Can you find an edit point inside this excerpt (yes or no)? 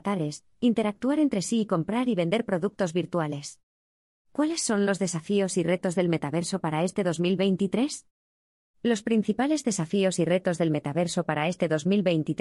no